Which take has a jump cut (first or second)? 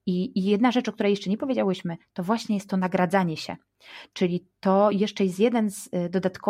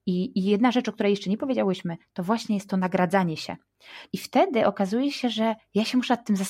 second